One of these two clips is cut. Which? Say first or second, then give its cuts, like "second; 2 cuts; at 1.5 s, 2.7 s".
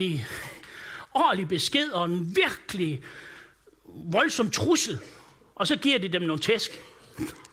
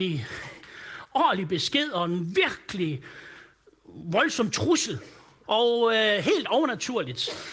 second; 1 cut; at 5.4 s